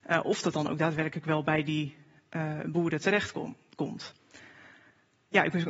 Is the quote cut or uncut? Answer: uncut